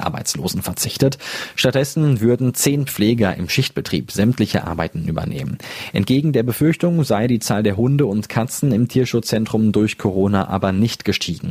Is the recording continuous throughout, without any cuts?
yes; 0 cuts

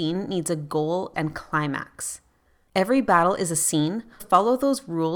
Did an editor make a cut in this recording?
yes; 3 cuts; at 1.1 s, 2.7 s, 4.2 s

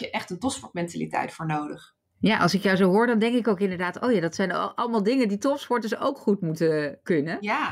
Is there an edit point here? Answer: no; 0 cuts

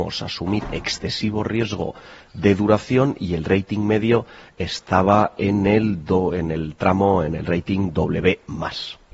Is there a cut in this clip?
no; 0 cuts

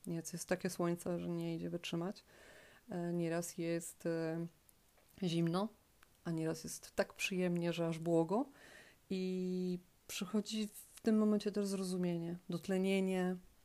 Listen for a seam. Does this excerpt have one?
no; 0 cuts

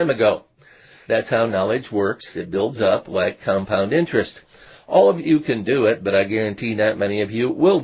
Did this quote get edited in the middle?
yes; 1 cut; at 1.0 s

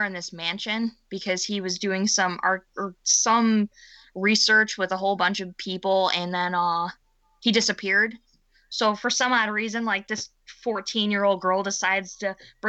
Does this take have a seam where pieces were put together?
no; 0 cuts

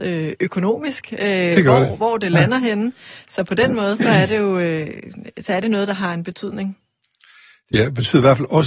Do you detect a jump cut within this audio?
no; 0 cuts

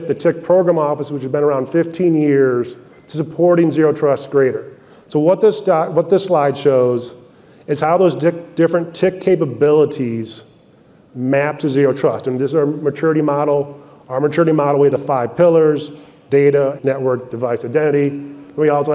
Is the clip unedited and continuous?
no; 1 cut; at 16.8 s

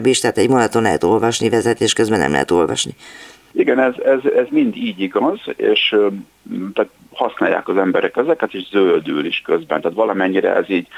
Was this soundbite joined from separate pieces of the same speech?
no; 0 cuts

